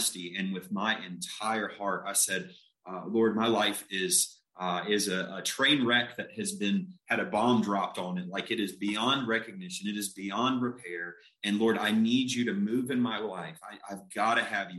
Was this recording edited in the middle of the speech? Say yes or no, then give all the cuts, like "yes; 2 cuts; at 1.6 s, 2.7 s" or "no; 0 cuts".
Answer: no; 0 cuts